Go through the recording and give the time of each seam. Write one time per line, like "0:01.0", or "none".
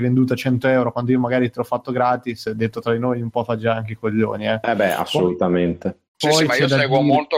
none